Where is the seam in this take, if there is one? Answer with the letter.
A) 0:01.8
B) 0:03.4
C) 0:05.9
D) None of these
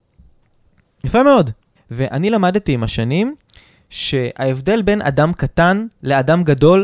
A